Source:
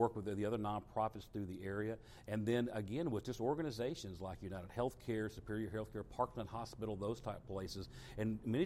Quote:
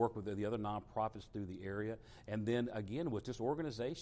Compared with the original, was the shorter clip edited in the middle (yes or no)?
no